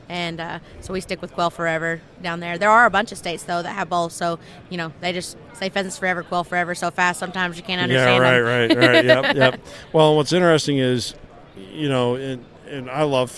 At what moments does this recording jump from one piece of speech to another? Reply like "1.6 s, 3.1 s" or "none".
none